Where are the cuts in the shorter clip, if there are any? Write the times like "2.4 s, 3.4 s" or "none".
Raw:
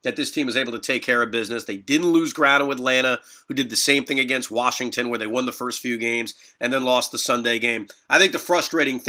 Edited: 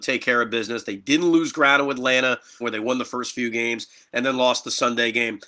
2.6 s